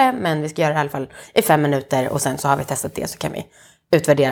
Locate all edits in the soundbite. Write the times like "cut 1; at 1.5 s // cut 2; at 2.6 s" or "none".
none